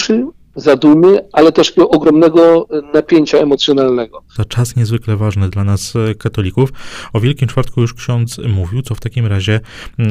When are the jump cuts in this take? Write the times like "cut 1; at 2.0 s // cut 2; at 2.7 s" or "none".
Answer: cut 1; at 4.4 s

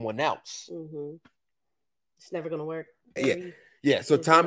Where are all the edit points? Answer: cut 1; at 3.2 s

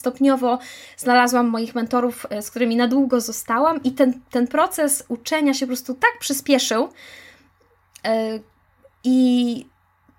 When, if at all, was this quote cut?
none

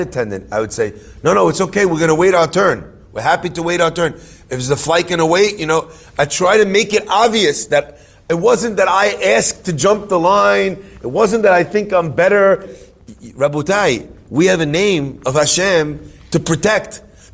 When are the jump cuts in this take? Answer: cut 1; at 12.6 s

